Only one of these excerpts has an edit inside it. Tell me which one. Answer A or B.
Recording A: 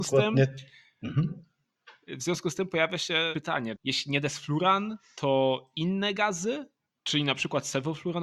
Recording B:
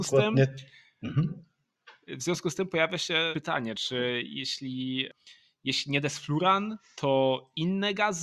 A